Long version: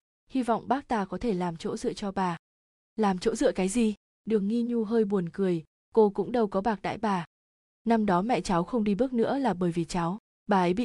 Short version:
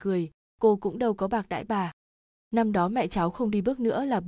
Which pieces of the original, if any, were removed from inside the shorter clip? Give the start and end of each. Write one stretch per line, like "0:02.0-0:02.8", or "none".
none